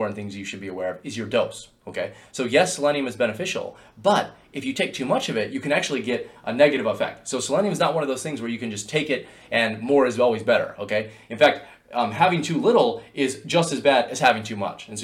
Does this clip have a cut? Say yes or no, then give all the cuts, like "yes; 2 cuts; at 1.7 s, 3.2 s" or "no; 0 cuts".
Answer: no; 0 cuts